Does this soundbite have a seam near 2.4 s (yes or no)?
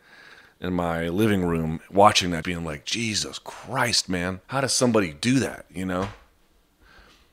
yes